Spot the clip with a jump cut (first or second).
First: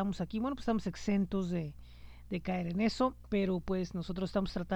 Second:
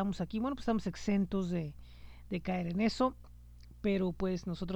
first